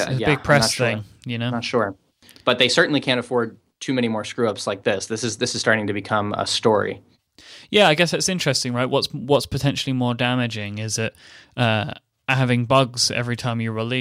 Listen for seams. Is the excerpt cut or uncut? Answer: uncut